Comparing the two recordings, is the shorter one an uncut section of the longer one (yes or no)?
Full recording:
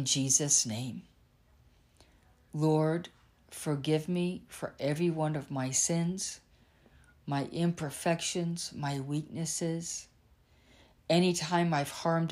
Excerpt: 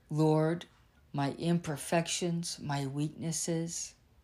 no